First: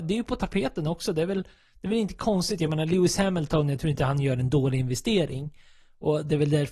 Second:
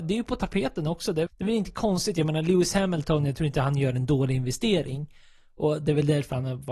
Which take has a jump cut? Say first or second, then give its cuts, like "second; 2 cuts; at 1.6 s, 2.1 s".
second; 1 cut; at 1.3 s